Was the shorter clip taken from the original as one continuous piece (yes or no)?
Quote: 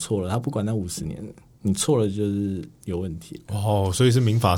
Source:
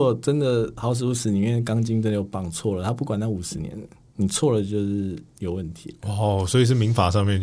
yes